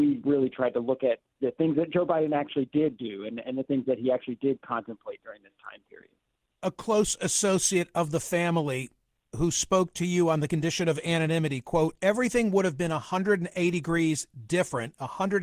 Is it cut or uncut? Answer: uncut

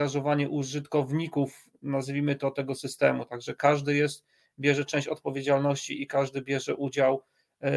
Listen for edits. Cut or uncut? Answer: uncut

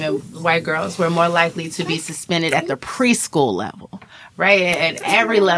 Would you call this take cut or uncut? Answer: uncut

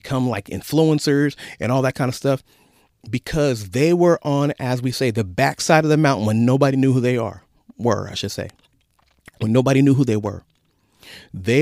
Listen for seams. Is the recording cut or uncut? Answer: uncut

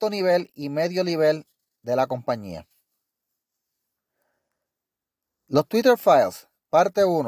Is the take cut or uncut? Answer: uncut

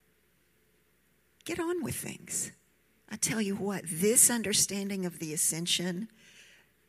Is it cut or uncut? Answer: cut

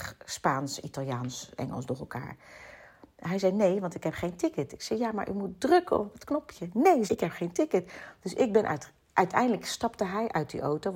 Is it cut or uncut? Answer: cut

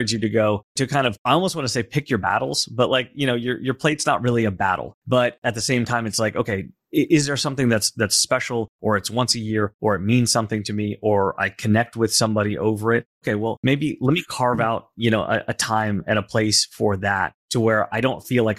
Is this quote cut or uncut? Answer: uncut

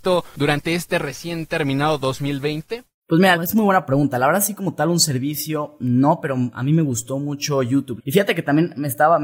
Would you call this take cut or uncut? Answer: cut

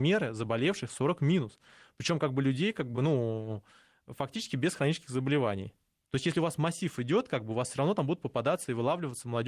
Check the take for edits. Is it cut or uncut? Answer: uncut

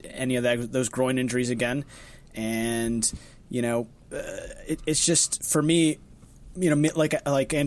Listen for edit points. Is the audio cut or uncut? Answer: uncut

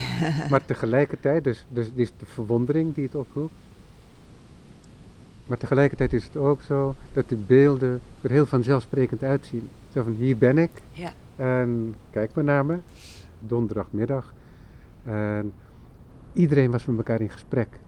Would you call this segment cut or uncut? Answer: cut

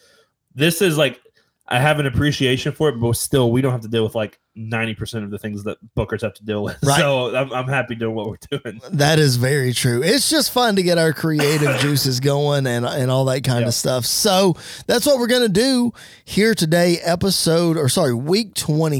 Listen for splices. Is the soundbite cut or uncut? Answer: uncut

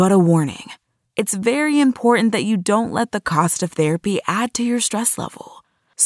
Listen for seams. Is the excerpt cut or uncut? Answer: uncut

